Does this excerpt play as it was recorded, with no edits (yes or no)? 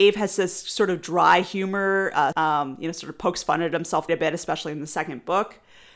no